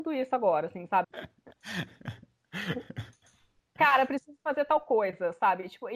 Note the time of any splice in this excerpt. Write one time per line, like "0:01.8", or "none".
0:01.0